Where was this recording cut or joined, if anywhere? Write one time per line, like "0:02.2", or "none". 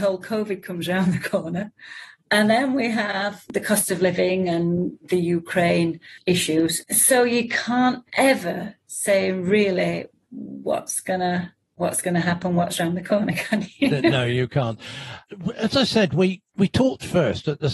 0:06.8

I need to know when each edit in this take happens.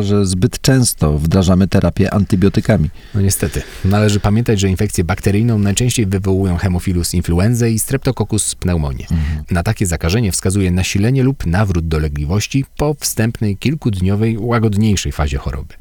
none

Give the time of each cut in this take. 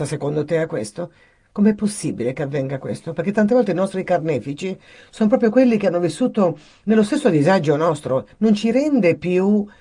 none

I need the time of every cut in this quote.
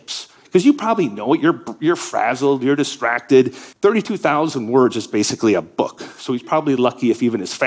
0:03.7

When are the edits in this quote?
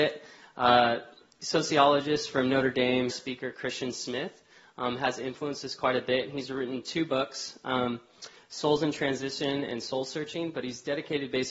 0:03.1

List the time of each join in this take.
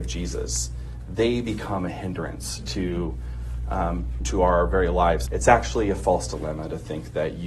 0:04.2
0:05.3

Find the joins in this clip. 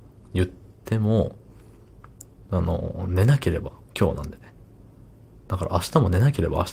none

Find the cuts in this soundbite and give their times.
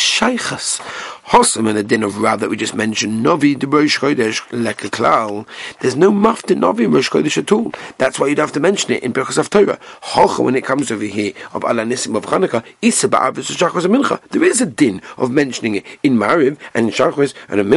none

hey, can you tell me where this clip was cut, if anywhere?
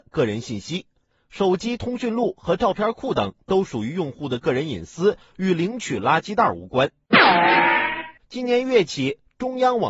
0:08.2

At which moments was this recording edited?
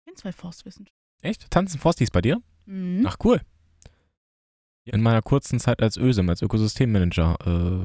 0:01.1
0:04.9

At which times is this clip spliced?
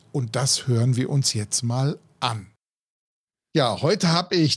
none

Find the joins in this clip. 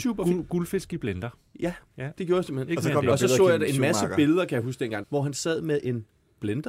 0:05.0

